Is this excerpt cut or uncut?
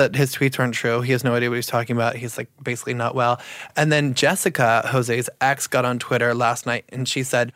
uncut